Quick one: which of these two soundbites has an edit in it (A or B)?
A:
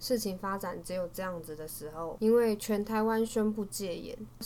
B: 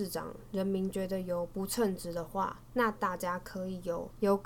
A